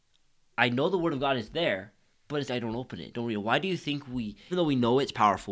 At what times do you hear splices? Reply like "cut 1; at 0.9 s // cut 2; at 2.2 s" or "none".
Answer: cut 1; at 2.5 s // cut 2; at 4.5 s